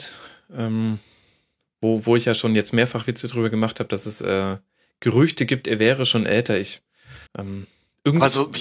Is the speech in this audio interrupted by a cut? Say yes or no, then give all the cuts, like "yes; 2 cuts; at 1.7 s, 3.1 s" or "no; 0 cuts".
yes; 1 cut; at 7.3 s